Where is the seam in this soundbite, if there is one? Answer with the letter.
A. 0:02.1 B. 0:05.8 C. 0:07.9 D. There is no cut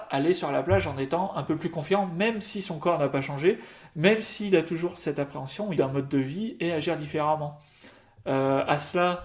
B